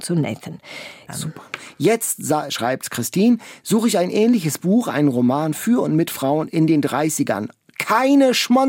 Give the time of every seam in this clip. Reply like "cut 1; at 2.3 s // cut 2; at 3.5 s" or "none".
cut 1; at 1.1 s

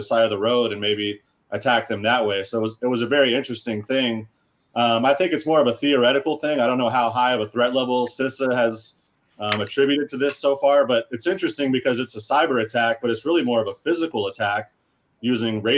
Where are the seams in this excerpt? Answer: none

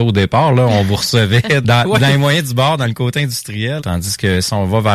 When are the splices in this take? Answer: cut 1; at 1.6 s // cut 2; at 3.8 s

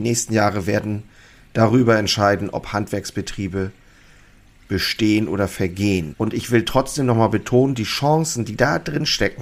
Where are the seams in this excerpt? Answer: cut 1; at 6.1 s

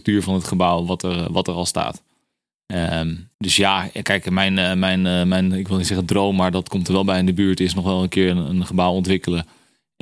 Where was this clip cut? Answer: cut 1; at 3.3 s

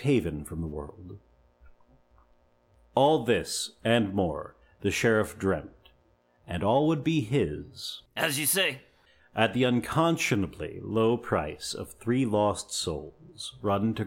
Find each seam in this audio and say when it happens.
cut 1; at 8.1 s

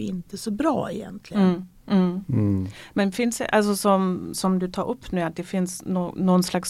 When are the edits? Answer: cut 1; at 4.3 s

